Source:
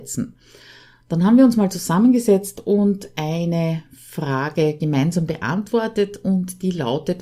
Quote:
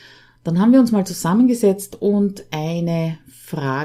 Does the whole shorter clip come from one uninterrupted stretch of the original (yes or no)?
yes